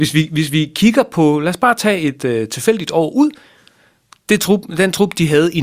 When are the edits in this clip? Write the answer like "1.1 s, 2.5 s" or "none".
none